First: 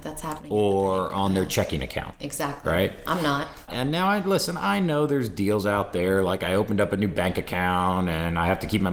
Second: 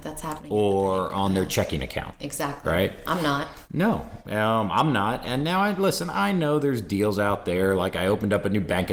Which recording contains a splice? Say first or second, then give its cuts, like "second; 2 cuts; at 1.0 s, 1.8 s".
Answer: first; 1 cut; at 3.7 s